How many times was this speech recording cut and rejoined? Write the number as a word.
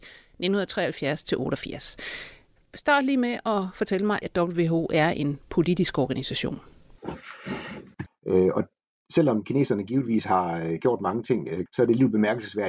three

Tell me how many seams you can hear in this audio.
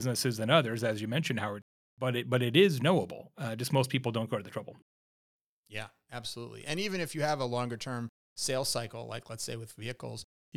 zero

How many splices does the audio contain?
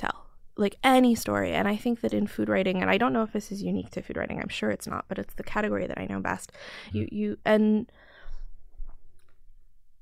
one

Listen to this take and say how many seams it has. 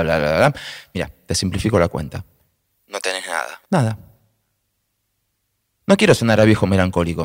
one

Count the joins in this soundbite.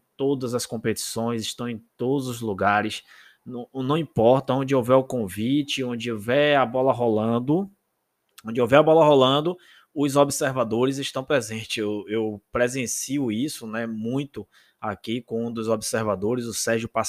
zero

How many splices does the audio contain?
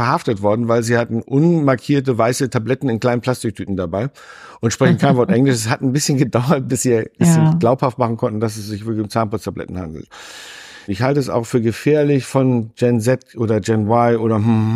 one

